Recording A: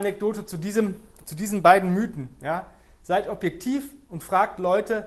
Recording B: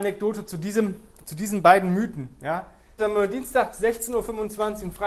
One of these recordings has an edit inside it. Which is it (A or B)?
B